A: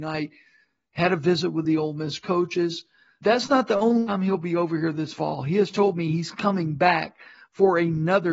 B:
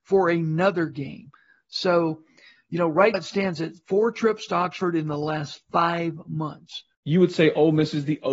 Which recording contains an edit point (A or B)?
B